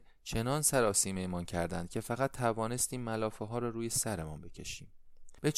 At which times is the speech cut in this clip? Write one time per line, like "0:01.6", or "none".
none